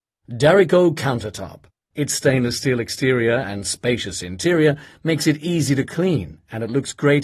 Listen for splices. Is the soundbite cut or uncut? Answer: cut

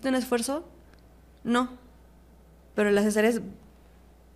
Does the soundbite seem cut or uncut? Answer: cut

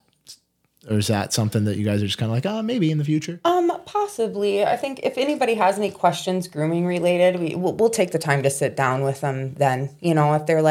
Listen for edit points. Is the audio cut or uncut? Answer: uncut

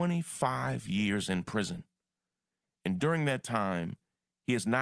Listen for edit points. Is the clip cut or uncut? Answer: uncut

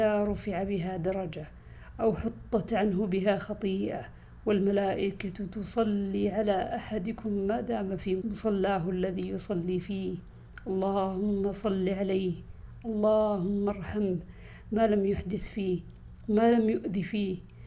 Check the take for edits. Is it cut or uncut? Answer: cut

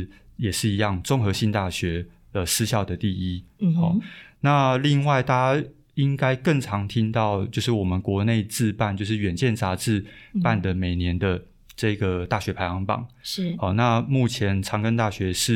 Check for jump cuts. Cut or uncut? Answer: uncut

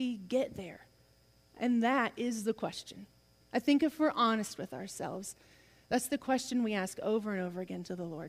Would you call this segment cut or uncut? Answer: uncut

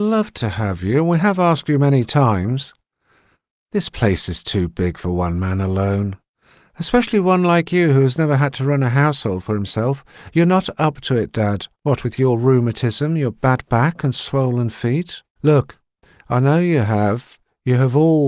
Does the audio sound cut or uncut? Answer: cut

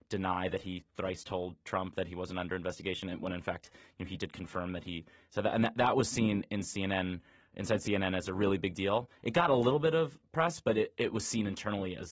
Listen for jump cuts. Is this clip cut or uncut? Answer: uncut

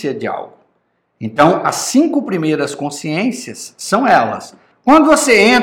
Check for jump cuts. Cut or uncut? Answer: cut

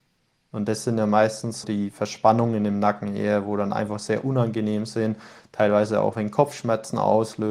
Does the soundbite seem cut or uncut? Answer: cut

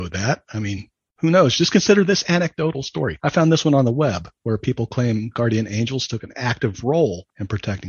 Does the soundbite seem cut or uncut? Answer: uncut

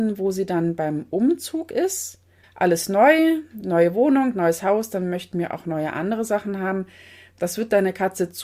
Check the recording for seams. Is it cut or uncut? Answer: cut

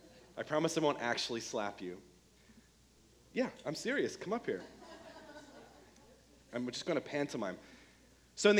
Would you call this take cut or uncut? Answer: uncut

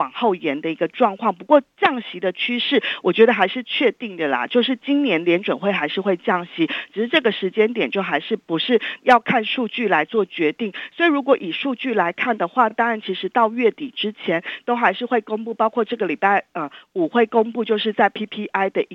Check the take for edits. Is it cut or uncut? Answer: uncut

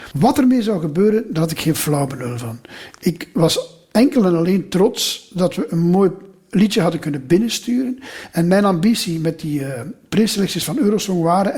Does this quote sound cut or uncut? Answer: uncut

